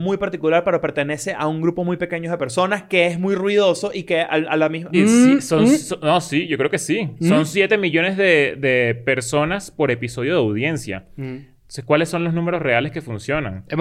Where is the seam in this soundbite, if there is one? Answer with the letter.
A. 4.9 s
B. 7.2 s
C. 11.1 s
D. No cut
A